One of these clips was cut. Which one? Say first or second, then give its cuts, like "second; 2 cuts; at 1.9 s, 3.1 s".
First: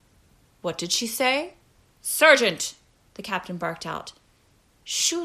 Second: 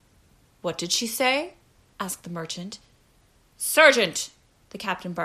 first; 1 cut; at 1.9 s